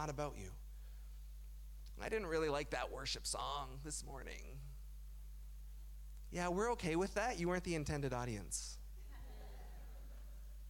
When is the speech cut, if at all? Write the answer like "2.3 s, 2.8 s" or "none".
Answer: none